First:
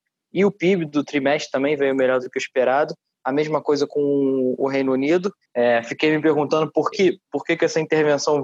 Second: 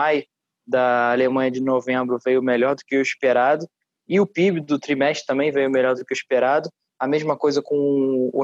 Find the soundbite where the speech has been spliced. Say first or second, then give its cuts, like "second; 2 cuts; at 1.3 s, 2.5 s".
first; 2 cuts; at 5.4 s, 6.9 s